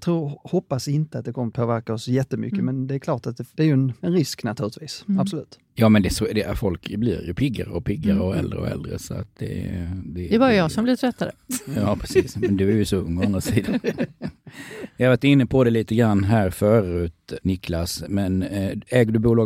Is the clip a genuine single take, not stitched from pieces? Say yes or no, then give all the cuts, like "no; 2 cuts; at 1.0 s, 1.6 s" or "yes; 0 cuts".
yes; 0 cuts